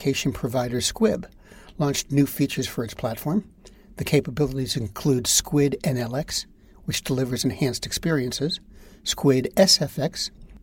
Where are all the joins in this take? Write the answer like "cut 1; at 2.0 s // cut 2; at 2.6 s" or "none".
none